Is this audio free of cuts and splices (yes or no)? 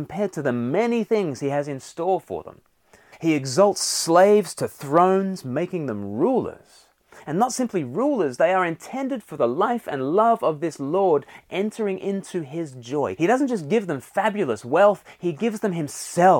no